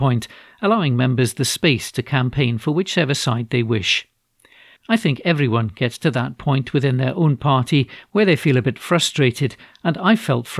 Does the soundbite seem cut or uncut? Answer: cut